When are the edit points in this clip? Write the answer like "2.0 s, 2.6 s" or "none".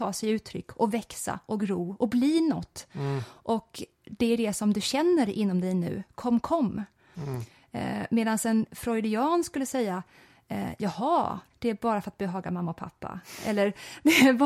11.5 s